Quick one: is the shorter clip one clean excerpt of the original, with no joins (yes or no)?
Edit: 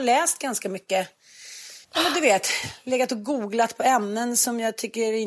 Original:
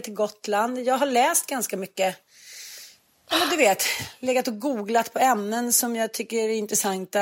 no